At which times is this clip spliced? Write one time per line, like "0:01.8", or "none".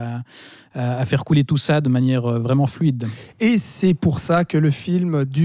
none